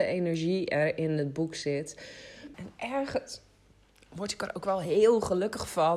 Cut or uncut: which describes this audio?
cut